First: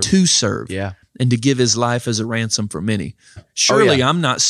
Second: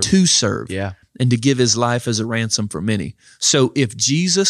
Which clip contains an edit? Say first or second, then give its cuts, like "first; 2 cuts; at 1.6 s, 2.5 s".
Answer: first; 1 cut; at 3.4 s